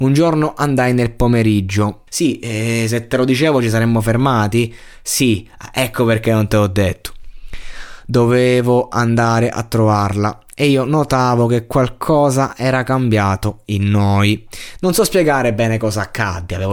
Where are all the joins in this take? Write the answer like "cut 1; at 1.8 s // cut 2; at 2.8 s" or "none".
cut 1; at 2.1 s